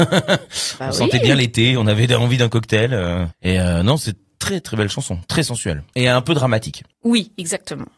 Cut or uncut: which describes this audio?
uncut